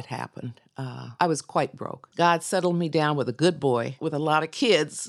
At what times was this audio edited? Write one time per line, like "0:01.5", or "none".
0:02.1